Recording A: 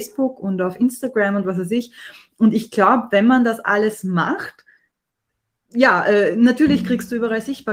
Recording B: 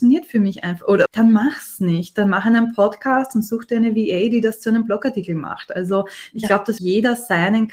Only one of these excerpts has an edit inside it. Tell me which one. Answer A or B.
B